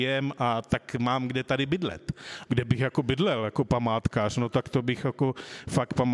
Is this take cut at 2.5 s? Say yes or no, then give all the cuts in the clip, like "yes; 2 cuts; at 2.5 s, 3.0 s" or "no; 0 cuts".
yes; 1 cut; at 2.5 s